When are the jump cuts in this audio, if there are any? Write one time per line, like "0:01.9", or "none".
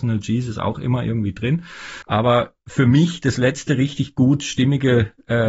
0:02.0